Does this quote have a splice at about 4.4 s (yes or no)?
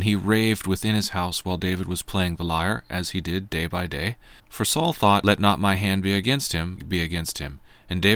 yes